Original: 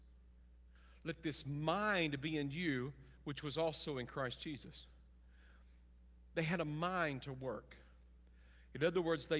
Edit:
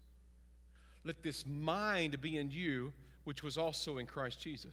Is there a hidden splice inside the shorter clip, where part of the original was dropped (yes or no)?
no